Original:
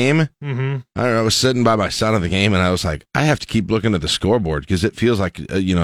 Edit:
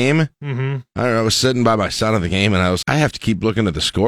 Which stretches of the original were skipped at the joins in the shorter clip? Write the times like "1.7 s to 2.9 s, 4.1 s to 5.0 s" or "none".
2.8 s to 3.1 s